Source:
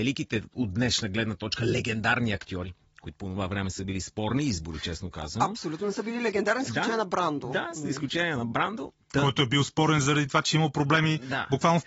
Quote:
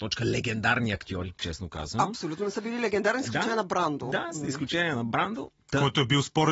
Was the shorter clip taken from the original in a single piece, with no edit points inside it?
no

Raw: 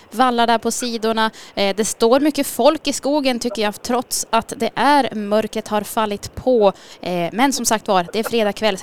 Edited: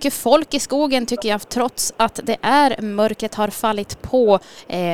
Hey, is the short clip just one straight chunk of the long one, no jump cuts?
yes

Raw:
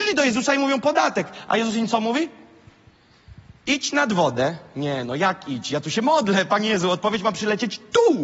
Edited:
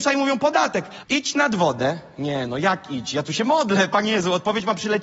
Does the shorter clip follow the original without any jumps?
no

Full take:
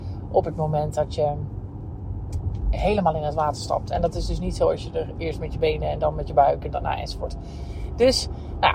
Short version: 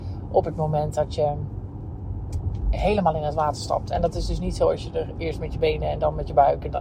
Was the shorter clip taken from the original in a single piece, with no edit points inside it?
yes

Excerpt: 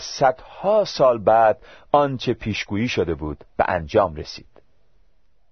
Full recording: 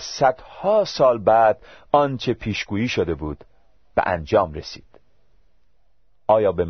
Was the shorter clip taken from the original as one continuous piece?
no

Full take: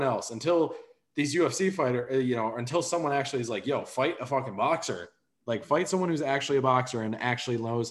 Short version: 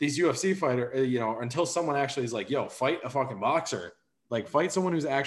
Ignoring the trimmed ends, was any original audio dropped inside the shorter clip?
no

